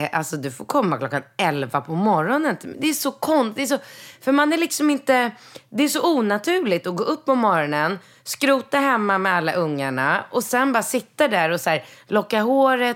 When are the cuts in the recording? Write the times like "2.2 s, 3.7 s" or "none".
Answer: none